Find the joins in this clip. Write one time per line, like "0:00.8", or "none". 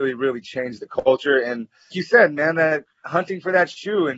0:01.9